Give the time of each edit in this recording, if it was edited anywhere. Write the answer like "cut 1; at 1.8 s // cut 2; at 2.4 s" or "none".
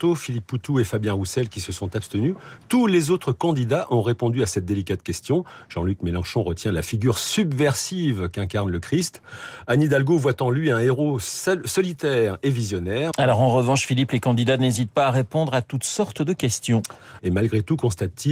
cut 1; at 13.1 s // cut 2; at 17.2 s